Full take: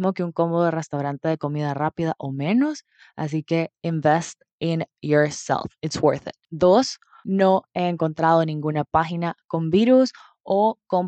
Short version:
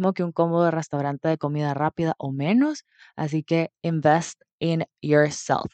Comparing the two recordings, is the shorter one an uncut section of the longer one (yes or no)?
yes